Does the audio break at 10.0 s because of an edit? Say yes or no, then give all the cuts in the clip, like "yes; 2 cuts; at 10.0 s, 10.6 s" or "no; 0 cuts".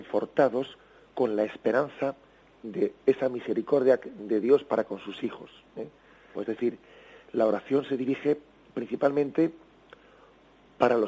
no; 1 cut; at 6.3 s